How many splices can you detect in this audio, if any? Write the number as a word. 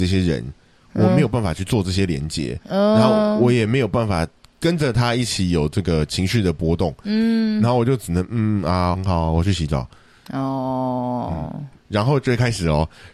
two